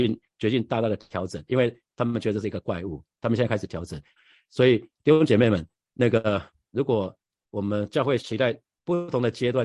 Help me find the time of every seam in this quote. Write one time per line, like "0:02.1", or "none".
0:04.2
0:08.2